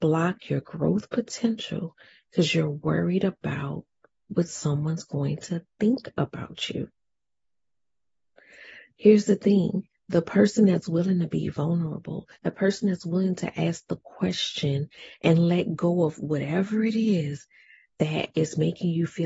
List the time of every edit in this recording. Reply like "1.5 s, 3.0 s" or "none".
12.4 s

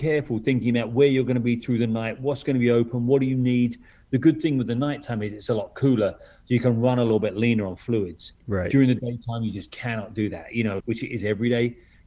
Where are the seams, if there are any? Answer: 10.8 s

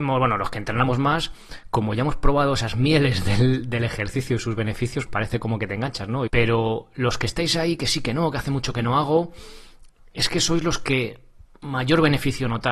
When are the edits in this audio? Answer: 5.1 s, 6.3 s

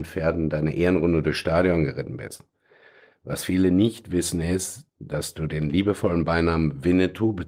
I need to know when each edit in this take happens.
none

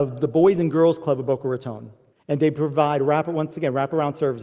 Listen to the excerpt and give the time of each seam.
2.1 s

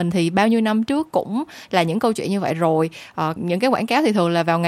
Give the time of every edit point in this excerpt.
3.4 s

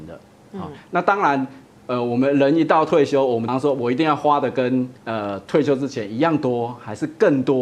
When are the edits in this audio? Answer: 3.5 s, 5.0 s

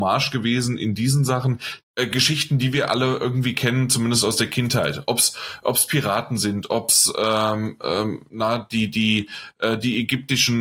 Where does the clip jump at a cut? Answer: 1.8 s

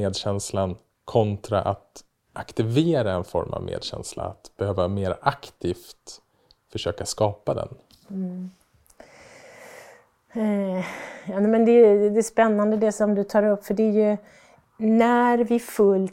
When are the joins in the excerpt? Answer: none

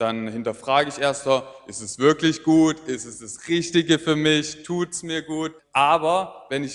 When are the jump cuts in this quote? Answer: 5.6 s

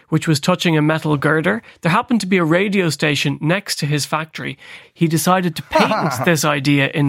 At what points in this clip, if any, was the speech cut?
4.8 s

